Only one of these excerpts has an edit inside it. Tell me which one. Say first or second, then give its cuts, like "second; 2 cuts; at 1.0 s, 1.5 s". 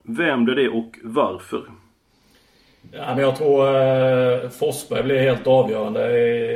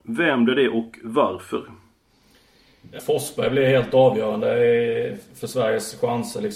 second; 1 cut; at 3.0 s